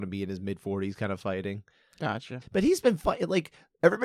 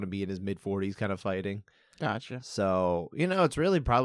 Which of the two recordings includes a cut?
first; 1 cut; at 2.4 s

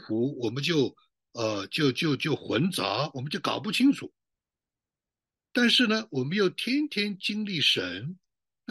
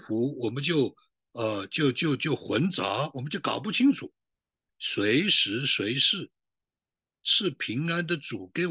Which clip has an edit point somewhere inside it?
second; 1 cut; at 4.7 s

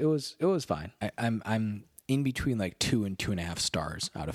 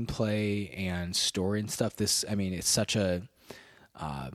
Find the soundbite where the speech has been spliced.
first; 1 cut; at 1.0 s

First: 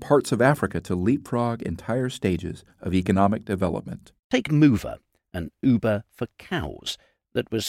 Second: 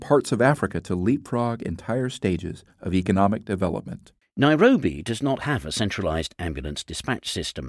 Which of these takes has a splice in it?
second; 1 cut; at 4.2 s

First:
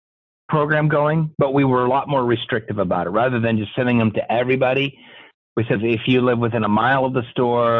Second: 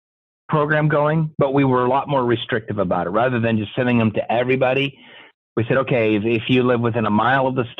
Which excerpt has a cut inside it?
first; 1 cut; at 5.8 s

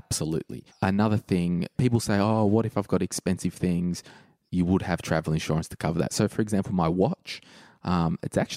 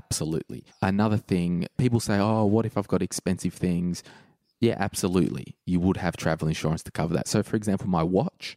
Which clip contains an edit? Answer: first; 1 cut; at 4.5 s

